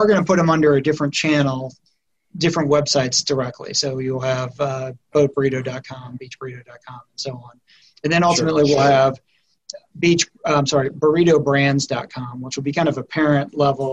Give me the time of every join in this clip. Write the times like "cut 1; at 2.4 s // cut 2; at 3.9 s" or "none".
none

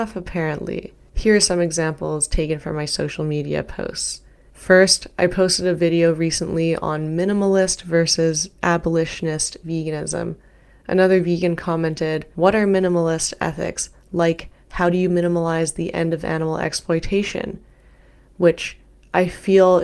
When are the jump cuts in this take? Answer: none

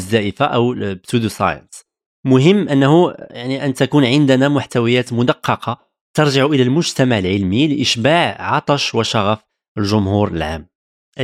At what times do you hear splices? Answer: none

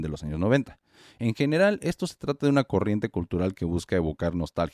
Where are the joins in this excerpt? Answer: none

